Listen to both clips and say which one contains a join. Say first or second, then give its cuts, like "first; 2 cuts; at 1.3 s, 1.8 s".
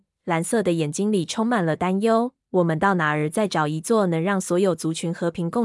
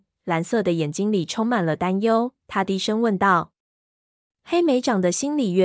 second; 2 cuts; at 2.4 s, 4.3 s